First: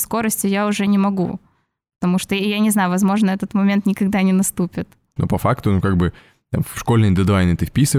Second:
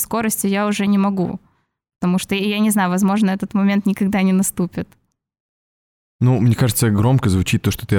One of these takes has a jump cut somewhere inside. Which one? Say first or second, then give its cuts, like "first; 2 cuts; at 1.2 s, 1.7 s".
first; 1 cut; at 5.2 s